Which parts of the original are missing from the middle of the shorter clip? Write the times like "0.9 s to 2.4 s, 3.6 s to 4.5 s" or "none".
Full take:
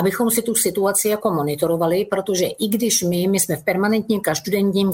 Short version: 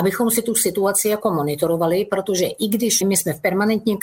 3.0 s to 3.2 s